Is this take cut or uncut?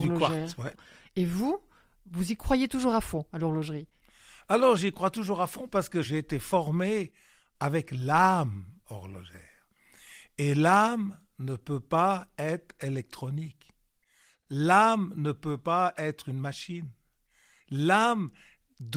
uncut